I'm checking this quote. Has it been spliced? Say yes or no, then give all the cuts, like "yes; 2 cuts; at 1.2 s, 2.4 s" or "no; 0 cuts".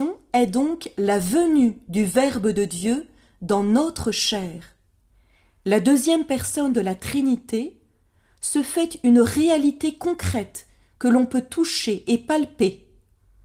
no; 0 cuts